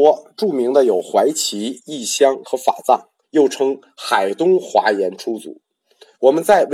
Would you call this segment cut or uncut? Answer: cut